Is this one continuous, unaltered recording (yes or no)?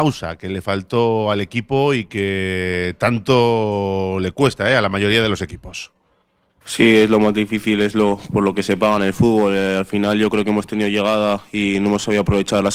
yes